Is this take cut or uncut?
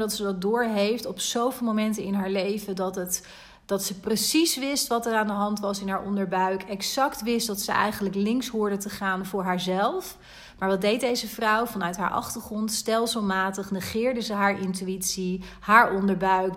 uncut